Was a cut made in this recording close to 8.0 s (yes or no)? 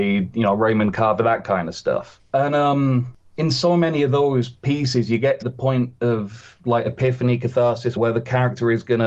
yes